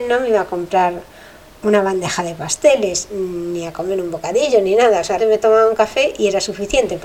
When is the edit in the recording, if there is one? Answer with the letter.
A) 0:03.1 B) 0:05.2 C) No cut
B